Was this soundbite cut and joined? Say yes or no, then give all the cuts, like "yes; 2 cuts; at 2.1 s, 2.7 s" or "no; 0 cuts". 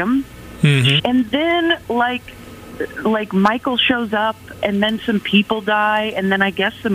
yes; 1 cut; at 1.0 s